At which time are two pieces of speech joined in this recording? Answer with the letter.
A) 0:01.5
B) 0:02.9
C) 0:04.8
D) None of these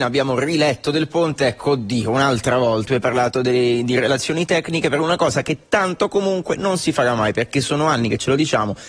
B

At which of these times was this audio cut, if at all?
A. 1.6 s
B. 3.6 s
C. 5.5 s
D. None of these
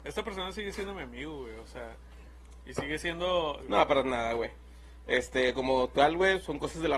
B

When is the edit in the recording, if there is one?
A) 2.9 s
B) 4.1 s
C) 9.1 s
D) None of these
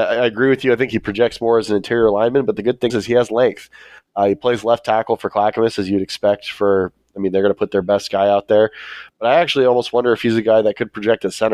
A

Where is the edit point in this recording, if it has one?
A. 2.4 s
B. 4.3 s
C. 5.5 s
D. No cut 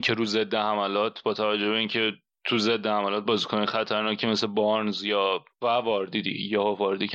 C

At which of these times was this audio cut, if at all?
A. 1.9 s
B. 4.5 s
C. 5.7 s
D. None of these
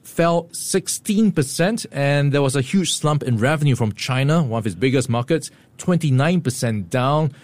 D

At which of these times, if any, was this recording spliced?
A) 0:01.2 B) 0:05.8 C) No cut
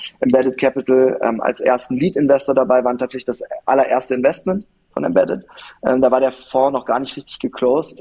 C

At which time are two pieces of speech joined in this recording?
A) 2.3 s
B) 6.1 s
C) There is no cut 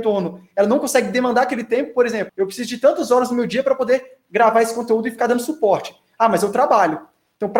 A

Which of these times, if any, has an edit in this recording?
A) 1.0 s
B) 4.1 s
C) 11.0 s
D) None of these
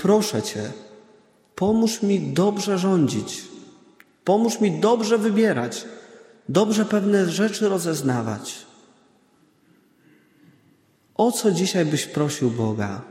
D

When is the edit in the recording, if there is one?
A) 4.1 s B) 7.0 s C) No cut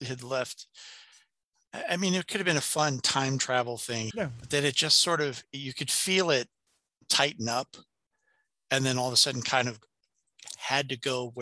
A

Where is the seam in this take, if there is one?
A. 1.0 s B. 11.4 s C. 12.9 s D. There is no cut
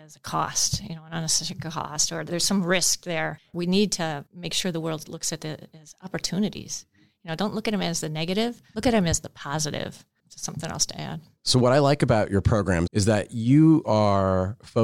C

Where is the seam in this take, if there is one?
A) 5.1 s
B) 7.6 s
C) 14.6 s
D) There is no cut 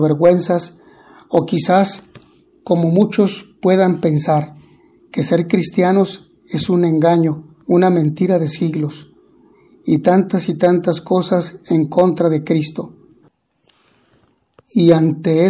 B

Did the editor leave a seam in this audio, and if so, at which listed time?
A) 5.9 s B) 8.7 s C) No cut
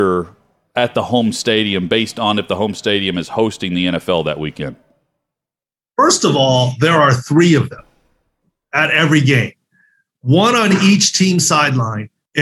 C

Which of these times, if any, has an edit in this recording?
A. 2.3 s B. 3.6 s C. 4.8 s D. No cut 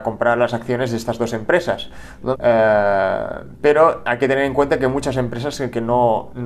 A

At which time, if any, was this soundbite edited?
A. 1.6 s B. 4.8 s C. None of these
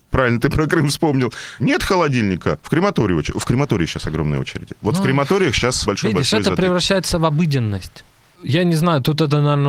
A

